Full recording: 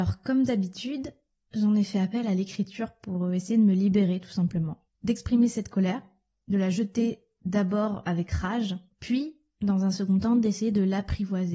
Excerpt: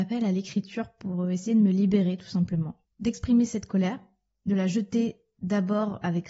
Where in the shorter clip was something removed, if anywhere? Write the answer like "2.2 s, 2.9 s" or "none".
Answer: none